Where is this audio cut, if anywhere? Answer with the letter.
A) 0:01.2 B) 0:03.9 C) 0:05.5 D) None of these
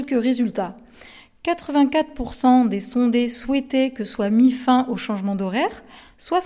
D